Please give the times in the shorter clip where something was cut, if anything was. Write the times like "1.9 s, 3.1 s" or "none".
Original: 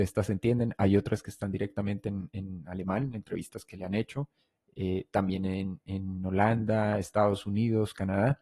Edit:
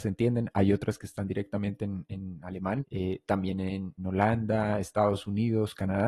2.8 s, 4.0 s